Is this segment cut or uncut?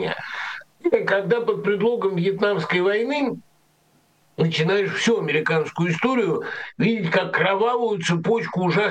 uncut